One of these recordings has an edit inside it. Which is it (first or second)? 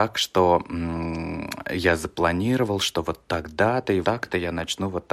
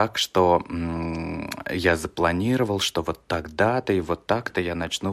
first